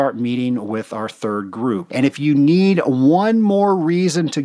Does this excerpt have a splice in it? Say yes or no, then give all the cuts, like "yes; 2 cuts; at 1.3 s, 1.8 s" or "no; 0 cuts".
yes; 1 cut; at 1.9 s